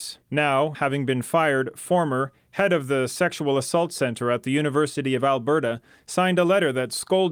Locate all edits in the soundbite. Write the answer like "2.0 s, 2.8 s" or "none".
none